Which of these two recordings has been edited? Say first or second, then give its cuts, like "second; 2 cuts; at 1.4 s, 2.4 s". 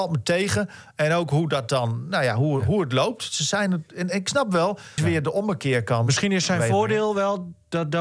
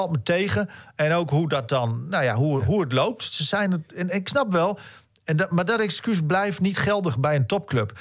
first; 1 cut; at 5.0 s